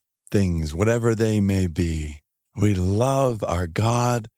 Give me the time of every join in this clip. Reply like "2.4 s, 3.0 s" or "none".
2.4 s